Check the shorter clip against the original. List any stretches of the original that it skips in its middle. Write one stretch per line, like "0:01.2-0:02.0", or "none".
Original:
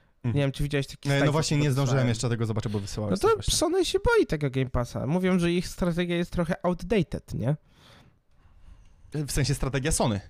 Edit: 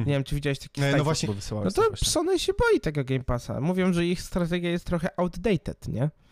0:01.5-0:02.7